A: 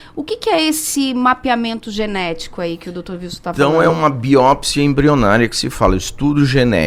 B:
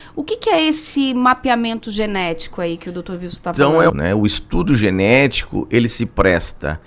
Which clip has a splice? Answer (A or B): B